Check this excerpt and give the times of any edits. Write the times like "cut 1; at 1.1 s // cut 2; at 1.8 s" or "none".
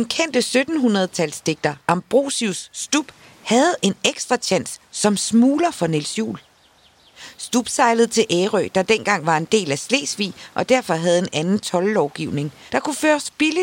cut 1; at 12.7 s